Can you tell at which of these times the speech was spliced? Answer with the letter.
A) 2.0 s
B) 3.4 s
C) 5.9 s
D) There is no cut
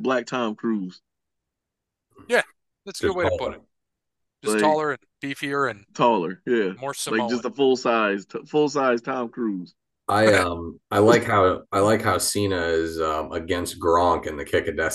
C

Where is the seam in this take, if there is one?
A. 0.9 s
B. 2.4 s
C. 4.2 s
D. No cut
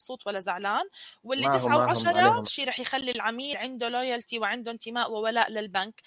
B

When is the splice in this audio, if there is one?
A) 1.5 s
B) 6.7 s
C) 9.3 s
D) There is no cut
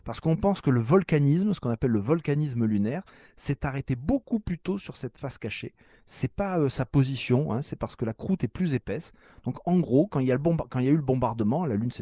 D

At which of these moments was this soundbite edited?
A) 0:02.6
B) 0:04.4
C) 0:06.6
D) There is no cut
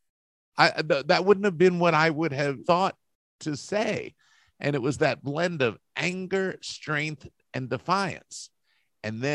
A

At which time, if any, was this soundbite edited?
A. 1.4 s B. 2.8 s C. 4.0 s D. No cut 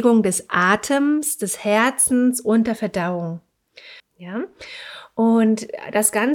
C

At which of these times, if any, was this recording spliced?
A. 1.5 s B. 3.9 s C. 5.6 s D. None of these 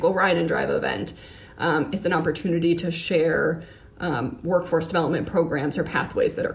D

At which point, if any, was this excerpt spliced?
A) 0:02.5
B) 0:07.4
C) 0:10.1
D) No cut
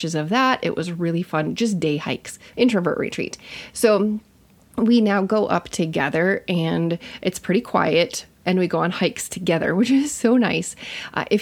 A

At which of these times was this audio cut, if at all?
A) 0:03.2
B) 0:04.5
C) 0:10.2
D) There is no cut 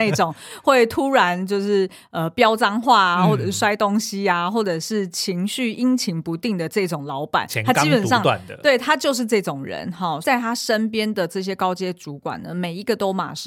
C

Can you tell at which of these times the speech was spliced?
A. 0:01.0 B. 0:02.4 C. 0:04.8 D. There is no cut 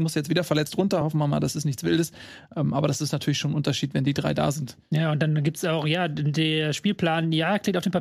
D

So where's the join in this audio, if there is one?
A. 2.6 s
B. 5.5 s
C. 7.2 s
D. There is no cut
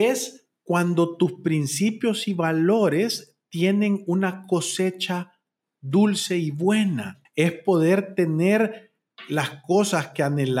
C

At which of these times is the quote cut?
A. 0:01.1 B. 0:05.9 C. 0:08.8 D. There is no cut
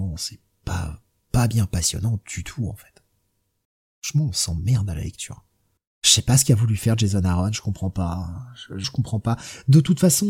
C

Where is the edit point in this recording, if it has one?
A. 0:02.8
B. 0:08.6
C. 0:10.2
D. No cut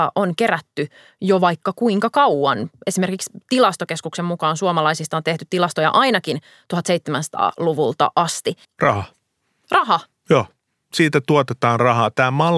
B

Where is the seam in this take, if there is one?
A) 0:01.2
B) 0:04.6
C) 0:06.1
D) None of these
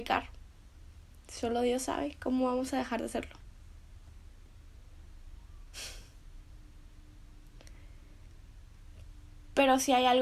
D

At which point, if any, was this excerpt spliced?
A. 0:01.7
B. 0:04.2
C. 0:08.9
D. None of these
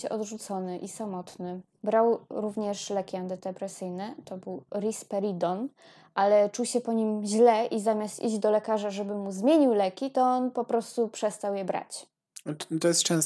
D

